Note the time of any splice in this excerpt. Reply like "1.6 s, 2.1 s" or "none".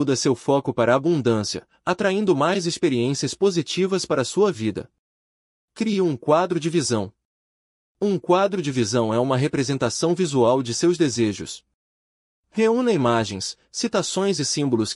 none